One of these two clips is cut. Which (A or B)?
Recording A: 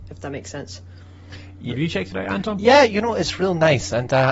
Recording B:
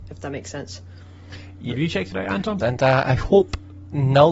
B